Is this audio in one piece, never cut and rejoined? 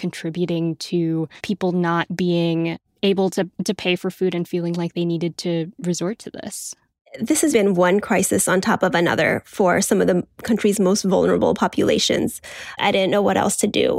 no; 3 cuts; at 1.4 s, 7.5 s, 12.8 s

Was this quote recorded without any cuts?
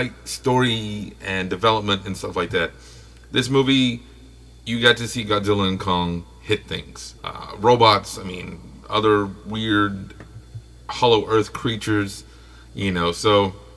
no; 1 cut; at 7.2 s

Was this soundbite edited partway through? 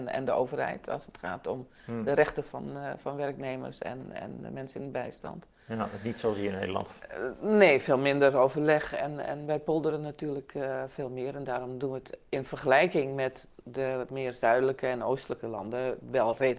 no; 0 cuts

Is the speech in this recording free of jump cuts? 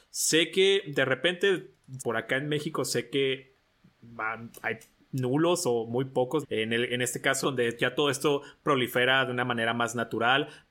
no; 3 cuts; at 2.0 s, 6.4 s, 7.4 s

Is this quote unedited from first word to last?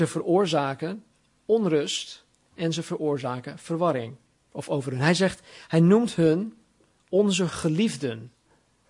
no; 1 cut; at 4.5 s

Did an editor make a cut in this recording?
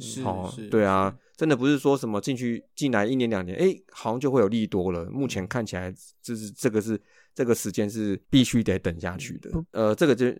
no; 0 cuts

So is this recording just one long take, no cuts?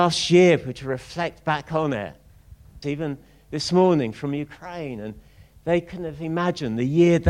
no; 1 cut; at 2.8 s

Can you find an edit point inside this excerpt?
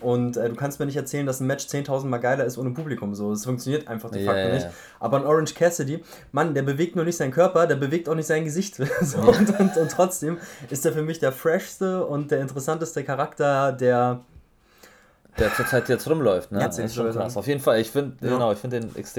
yes; 1 cut; at 16.6 s

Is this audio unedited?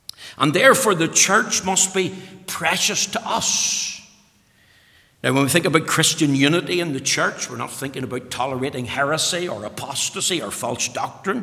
yes; 0 cuts

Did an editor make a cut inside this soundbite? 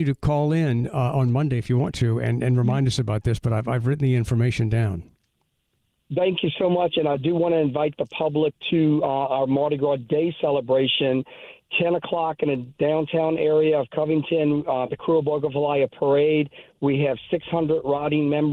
no; 0 cuts

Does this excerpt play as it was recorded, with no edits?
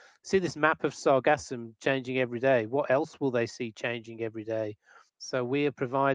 no; 1 cut; at 5.1 s

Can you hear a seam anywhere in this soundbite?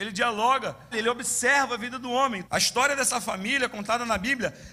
yes; 2 cuts; at 0.9 s, 2.4 s

